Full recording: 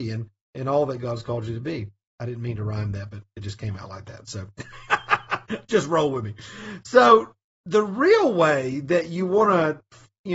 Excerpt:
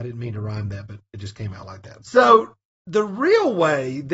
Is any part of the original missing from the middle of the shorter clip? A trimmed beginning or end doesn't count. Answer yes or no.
yes